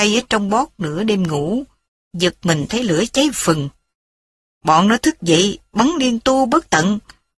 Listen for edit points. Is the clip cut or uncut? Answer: cut